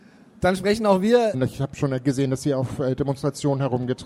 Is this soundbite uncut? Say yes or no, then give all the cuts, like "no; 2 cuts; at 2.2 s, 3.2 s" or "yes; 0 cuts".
no; 1 cut; at 1.3 s